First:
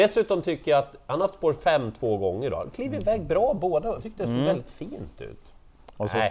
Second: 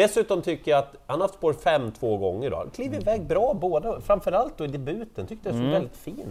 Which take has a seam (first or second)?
first